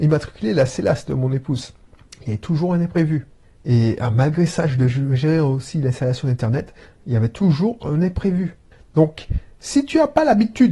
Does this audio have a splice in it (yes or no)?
no